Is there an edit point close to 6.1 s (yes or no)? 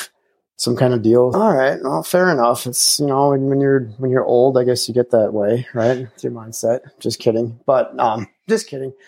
no